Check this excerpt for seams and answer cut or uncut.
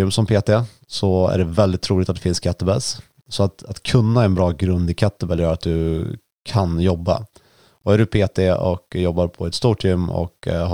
uncut